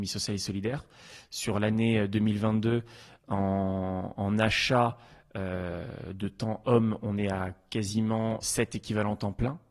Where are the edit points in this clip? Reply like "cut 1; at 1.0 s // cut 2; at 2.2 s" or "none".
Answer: cut 1; at 8.4 s